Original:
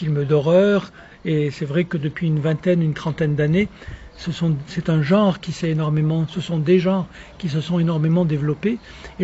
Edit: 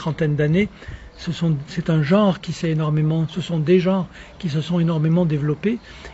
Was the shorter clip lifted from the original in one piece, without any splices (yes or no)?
yes